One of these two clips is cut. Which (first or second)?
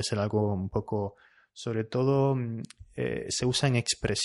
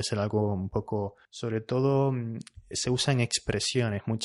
second